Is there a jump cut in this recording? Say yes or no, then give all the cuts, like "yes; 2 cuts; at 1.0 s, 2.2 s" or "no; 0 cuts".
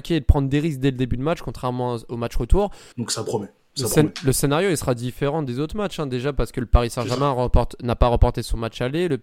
yes; 1 cut; at 2.9 s